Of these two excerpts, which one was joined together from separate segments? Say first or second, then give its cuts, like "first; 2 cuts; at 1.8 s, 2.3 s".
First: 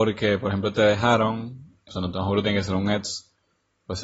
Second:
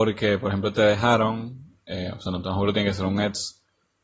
first; 1 cut; at 1.9 s